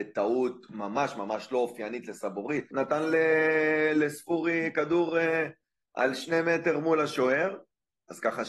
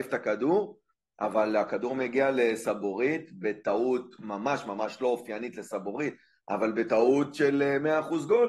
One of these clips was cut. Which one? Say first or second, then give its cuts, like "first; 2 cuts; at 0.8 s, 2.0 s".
first; 1 cut; at 2.7 s